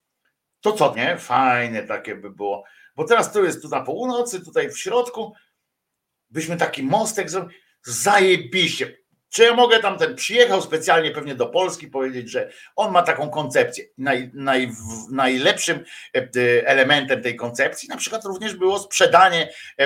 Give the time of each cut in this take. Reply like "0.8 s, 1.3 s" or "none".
0.9 s